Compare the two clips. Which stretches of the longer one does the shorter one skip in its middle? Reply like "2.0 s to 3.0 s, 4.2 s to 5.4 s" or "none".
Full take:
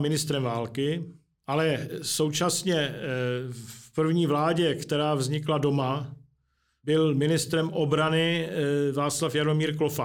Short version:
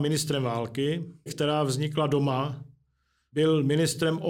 1.3 s to 4.8 s